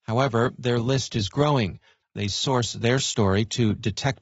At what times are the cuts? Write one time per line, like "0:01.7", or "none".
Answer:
0:02.0